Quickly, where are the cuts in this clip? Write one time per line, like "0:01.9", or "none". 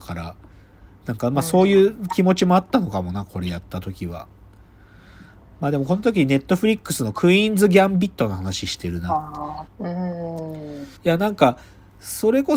0:09.7
0:11.0